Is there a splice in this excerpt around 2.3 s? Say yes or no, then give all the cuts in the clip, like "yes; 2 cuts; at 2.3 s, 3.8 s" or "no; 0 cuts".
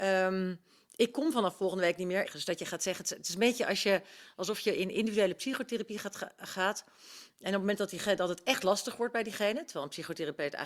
yes; 1 cut; at 2.3 s